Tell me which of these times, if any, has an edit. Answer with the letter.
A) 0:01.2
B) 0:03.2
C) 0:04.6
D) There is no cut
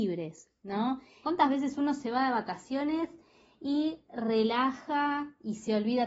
A